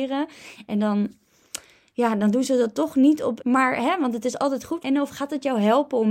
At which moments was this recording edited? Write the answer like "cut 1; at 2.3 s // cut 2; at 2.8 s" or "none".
cut 1; at 3.4 s // cut 2; at 4.8 s